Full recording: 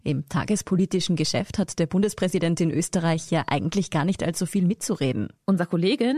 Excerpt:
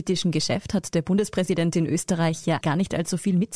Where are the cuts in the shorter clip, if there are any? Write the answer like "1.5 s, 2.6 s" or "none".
2.6 s